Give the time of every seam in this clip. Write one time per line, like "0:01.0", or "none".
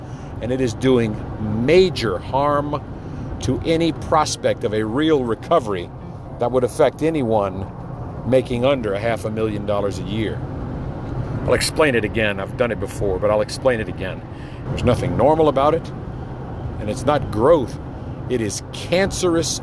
0:14.7